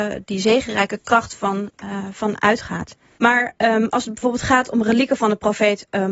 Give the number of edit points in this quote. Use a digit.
1